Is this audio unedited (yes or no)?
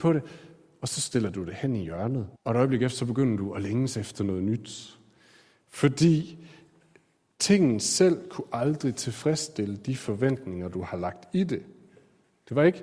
no